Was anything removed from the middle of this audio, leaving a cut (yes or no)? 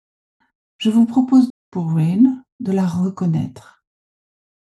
yes